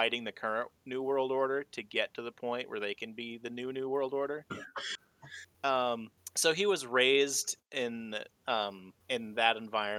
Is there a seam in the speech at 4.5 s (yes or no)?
yes